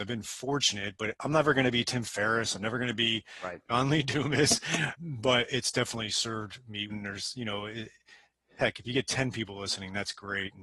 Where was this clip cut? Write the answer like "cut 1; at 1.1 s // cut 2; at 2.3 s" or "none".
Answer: cut 1; at 5.0 s // cut 2; at 6.9 s